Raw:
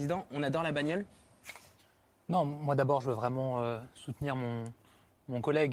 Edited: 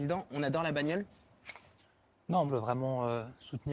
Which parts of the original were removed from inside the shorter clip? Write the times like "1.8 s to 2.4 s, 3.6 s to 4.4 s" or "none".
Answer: 2.5 s to 3.0 s